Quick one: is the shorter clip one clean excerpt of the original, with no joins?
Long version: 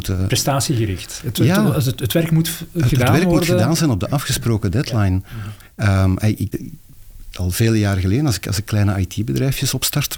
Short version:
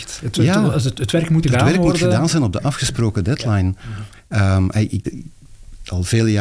no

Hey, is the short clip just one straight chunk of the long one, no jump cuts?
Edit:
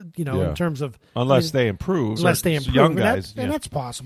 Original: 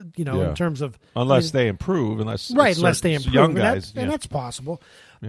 no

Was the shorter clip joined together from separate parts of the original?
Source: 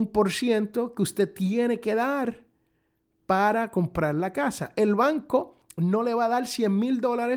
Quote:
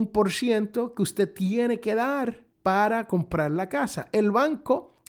yes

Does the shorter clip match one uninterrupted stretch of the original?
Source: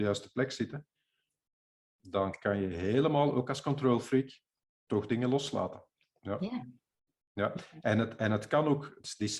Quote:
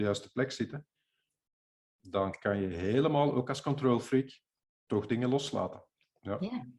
yes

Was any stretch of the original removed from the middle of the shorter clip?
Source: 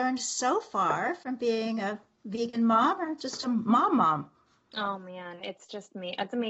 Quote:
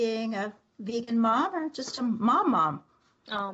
no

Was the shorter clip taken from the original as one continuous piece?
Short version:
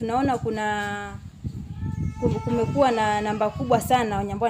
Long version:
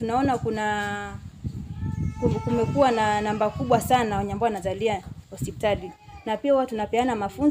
yes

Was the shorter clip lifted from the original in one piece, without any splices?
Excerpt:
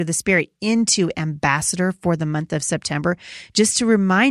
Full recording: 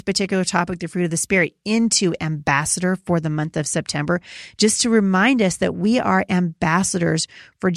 yes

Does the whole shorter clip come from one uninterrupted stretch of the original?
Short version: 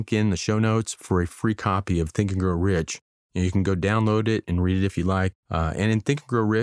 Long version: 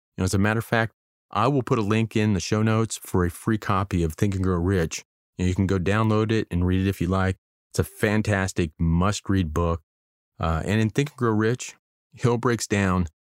no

